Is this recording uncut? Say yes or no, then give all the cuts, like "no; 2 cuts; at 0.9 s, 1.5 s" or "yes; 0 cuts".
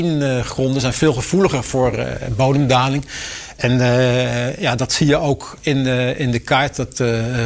yes; 0 cuts